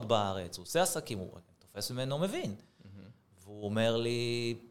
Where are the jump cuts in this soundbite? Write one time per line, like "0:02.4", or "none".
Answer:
none